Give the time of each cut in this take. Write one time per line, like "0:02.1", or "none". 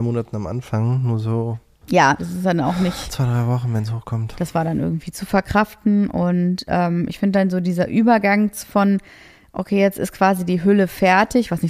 0:02.2